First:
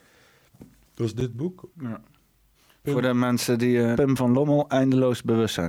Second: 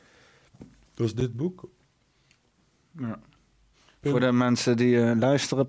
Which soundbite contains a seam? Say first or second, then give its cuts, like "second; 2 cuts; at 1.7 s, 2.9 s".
first; 2 cuts; at 1.7 s, 4.0 s